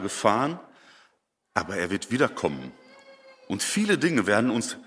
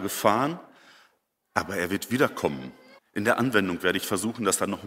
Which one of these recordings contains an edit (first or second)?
second